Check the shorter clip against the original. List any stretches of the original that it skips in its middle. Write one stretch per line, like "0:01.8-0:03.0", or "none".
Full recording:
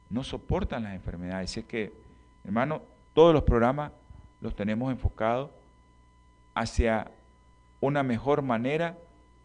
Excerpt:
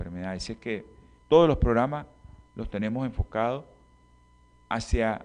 0:02.3-0:03.0